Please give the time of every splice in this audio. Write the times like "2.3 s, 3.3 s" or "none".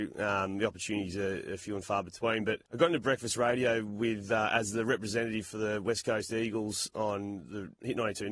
2.7 s